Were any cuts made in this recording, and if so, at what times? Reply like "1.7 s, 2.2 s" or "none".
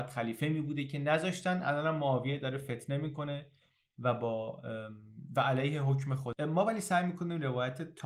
none